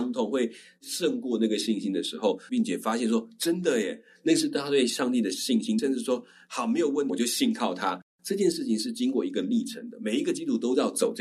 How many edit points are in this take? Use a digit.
3